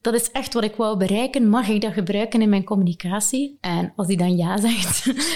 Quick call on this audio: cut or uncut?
uncut